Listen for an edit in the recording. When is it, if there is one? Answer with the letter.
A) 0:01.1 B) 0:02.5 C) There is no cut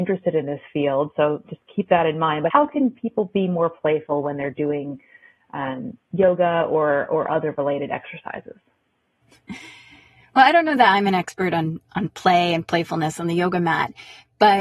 B